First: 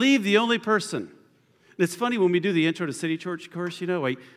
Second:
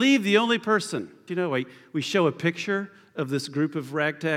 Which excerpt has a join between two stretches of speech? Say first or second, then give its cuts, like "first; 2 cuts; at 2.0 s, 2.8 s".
second; 1 cut; at 1.3 s